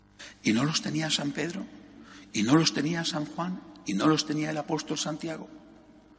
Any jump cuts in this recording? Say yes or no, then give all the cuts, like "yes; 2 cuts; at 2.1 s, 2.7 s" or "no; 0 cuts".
no; 0 cuts